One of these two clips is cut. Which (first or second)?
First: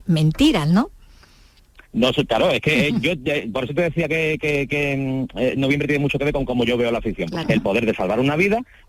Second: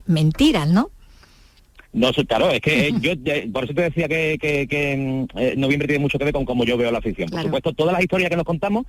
first